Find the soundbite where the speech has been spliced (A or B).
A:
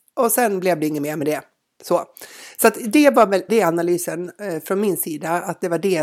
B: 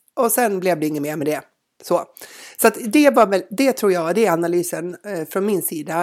A